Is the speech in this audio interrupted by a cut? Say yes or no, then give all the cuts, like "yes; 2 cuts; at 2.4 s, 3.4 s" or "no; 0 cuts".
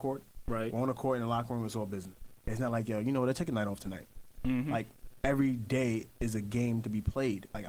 yes; 2 cuts; at 2.4 s, 4.3 s